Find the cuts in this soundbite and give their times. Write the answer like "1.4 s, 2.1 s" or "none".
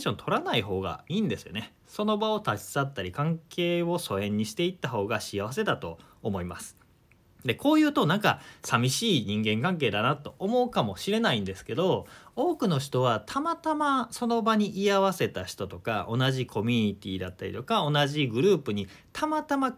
1.1 s